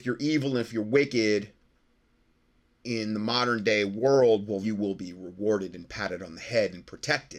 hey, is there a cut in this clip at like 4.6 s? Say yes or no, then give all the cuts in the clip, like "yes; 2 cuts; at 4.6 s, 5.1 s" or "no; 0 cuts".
yes; 1 cut; at 4.6 s